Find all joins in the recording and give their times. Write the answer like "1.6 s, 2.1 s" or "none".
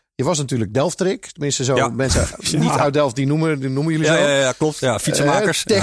none